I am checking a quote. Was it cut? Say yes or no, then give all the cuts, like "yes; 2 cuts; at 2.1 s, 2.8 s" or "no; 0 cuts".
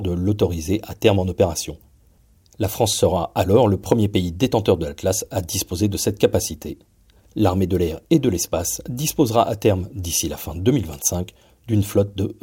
no; 0 cuts